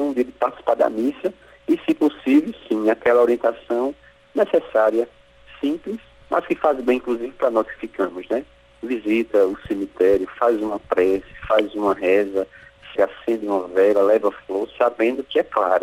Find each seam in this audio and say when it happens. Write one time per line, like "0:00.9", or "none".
0:13.0